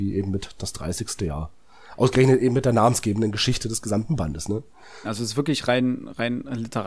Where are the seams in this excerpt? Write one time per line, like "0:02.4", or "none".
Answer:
0:05.0